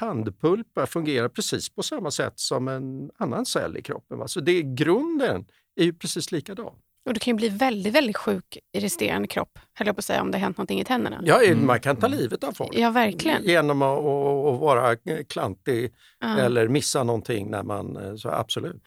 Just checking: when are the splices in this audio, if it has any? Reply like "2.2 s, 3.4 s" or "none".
none

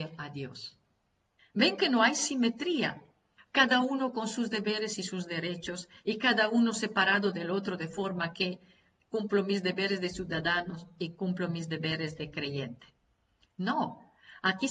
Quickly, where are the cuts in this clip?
1.4 s, 3.4 s

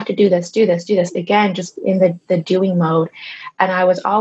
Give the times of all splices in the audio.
none

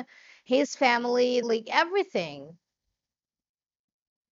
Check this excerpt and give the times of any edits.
1.4 s

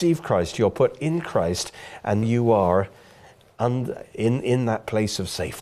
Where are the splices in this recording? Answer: 2.2 s

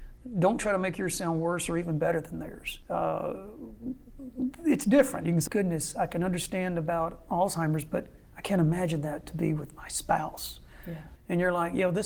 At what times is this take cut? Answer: 5.5 s, 11.2 s

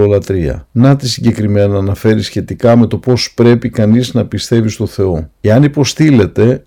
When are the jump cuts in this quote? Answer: none

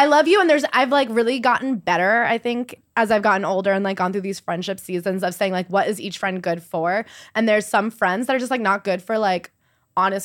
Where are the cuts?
none

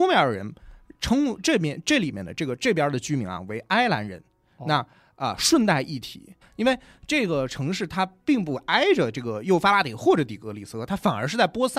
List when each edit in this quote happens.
6.4 s

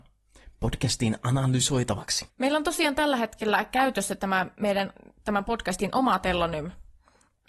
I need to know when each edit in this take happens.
2.3 s

